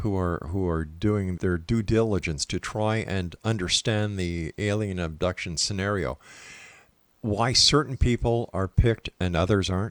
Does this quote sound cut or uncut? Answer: cut